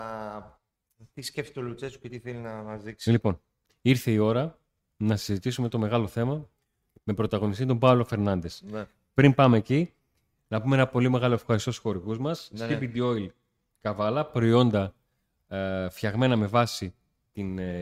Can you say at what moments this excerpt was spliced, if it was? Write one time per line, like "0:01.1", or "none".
none